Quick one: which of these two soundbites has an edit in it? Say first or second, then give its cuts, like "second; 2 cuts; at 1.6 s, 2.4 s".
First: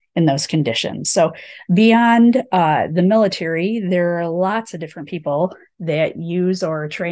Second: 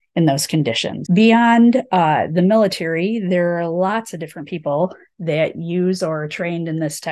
second; 1 cut; at 1.0 s